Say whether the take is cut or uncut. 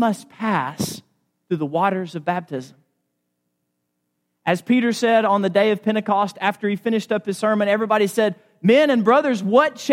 uncut